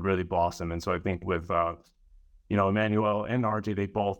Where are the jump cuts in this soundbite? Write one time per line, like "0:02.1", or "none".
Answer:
none